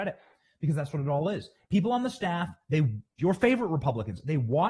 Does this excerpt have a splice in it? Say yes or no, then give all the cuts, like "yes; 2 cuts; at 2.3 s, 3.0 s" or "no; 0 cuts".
yes; 2 cuts; at 1.6 s, 3.2 s